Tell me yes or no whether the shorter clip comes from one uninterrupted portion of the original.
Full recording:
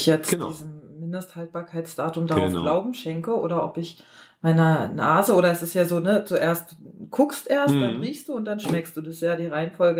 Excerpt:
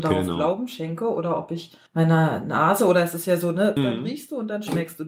no